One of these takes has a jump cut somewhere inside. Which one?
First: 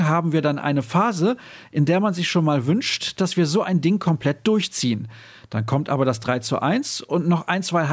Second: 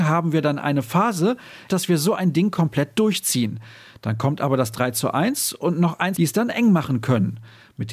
second; 2 cuts; at 1.7 s, 6.1 s

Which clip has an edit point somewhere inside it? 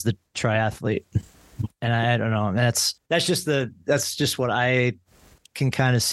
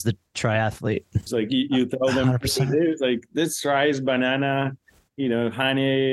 second; 1 cut; at 1.3 s

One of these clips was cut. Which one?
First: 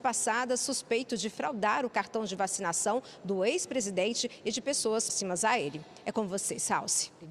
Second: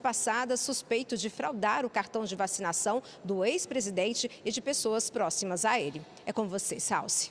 first; 1 cut; at 5.1 s

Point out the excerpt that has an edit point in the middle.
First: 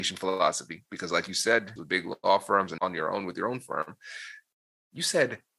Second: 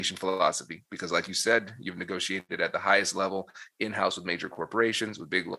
first; 2 cuts; at 1.8 s, 2.8 s

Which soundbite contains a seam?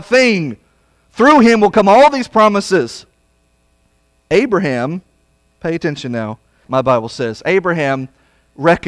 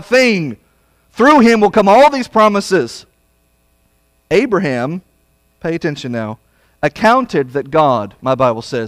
first; 1 cut; at 6.6 s

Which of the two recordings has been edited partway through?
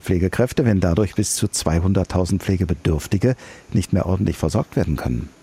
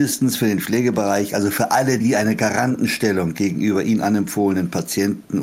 second; 1 cut; at 2.0 s

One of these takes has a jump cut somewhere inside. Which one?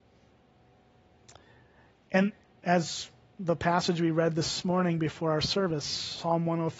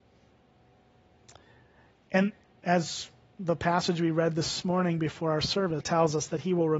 second; 1 cut; at 5.8 s

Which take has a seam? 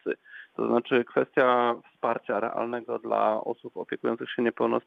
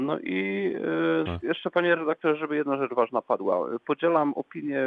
second; 1 cut; at 1.3 s

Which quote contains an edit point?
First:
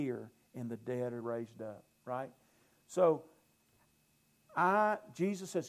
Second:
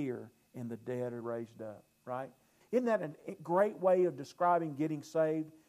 second; 1 cut; at 2.6 s

